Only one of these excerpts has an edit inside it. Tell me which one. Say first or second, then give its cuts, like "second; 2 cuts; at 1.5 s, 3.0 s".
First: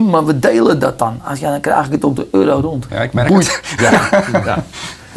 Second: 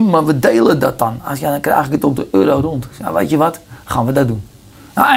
first; 1 cut; at 2.9 s